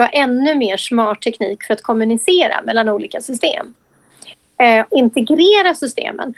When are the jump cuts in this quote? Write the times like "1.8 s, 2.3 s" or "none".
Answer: 4.9 s